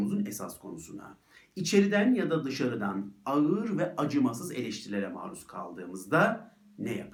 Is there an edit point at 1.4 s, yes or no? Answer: no